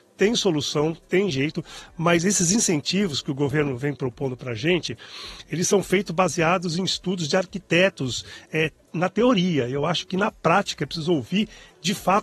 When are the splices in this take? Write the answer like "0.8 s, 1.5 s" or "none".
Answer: none